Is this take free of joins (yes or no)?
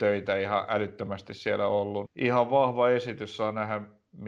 no